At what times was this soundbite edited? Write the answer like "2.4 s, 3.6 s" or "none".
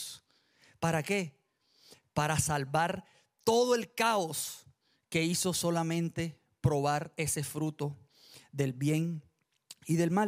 none

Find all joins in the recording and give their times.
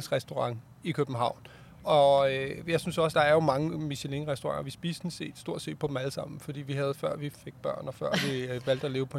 3.1 s

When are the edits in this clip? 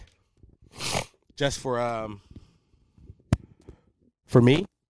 none

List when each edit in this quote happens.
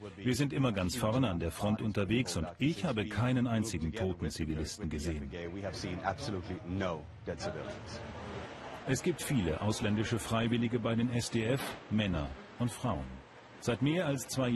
8.8 s, 13.6 s

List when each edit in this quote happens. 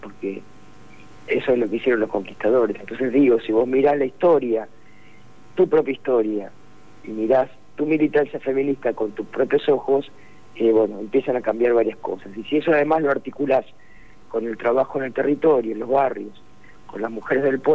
none

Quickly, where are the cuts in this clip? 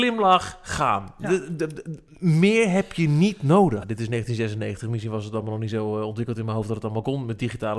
3.8 s

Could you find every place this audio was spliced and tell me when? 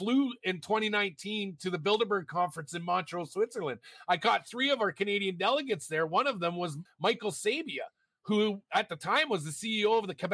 6.8 s

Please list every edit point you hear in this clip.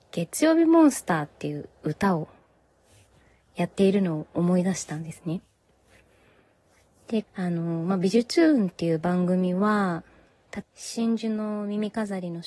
7.2 s, 10.6 s

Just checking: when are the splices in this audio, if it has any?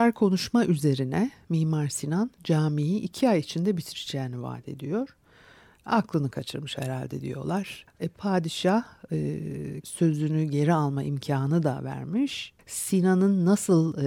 7.9 s, 9.8 s, 12.6 s

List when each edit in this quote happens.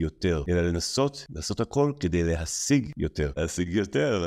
3.3 s

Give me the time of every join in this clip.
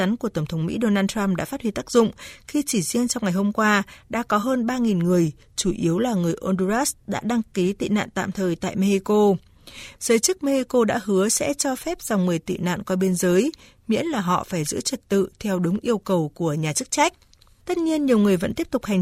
10.0 s, 17.6 s

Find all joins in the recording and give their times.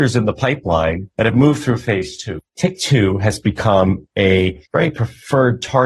none

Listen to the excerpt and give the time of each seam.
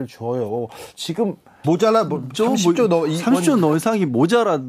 1.6 s

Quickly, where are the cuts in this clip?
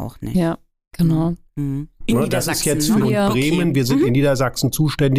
2.0 s, 3.0 s

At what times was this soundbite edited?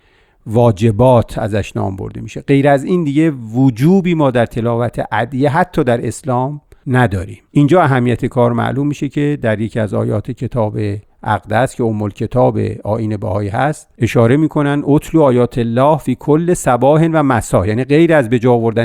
none

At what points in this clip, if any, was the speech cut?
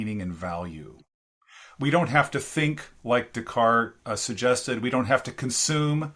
4.0 s

